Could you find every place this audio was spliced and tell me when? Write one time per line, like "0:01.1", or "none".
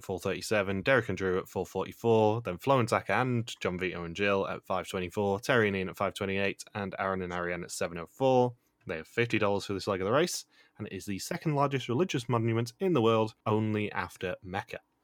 0:08.7
0:13.4